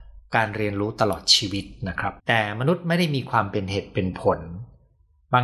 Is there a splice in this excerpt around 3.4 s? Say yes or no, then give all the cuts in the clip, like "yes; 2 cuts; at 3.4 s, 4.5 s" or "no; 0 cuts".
no; 1 cut; at 2.2 s